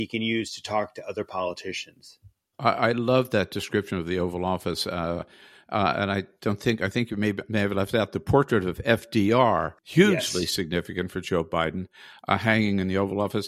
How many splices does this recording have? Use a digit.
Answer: 1